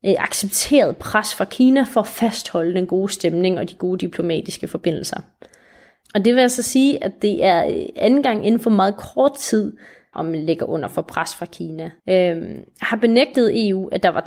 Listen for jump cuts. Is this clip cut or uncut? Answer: cut